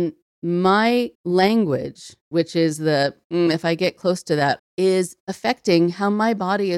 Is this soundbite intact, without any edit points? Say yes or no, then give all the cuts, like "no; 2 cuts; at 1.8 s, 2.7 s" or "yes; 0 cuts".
no; 2 cuts; at 1.1 s, 4.6 s